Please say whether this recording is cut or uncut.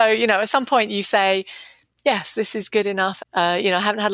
cut